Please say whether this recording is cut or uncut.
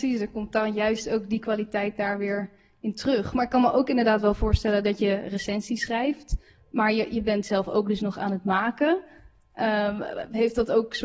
uncut